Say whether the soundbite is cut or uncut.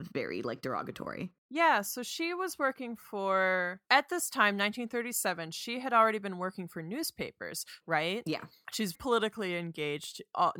cut